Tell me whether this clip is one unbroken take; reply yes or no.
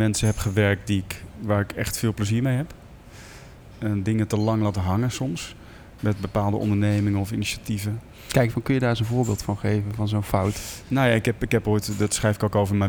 no